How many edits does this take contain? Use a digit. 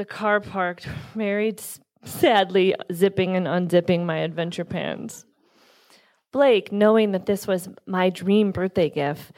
0